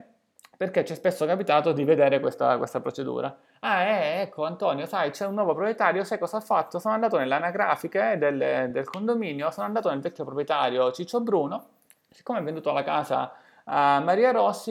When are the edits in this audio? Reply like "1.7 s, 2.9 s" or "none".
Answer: none